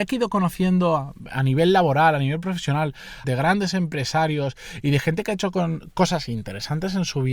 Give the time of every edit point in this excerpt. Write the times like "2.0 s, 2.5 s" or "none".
3.2 s